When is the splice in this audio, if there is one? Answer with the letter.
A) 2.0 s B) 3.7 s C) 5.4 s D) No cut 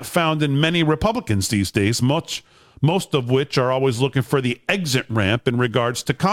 D